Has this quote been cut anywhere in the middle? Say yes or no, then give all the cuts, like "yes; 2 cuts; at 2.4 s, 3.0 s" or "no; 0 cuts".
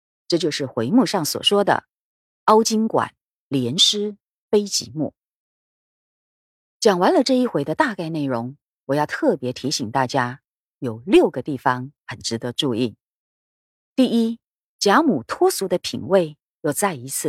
no; 0 cuts